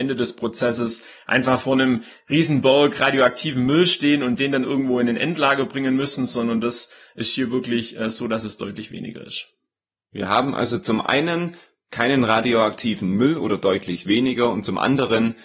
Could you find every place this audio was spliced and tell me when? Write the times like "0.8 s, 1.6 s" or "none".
none